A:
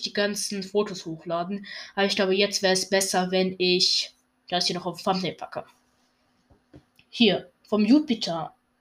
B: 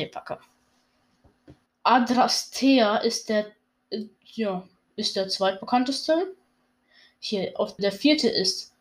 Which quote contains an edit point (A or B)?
B